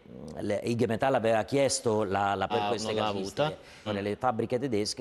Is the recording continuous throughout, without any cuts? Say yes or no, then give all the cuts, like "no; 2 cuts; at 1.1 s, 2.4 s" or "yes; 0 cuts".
no; 2 cuts; at 2.5 s, 3.9 s